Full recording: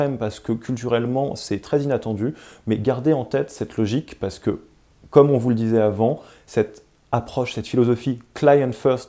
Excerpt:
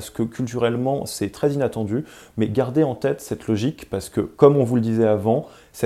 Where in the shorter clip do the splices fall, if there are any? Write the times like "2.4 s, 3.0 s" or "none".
4.3 s